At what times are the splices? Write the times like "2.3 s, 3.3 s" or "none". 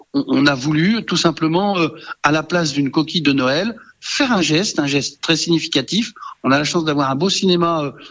none